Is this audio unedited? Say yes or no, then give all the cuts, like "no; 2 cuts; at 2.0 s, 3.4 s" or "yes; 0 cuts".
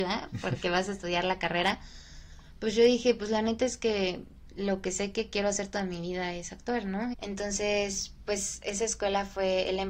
no; 1 cut; at 7.1 s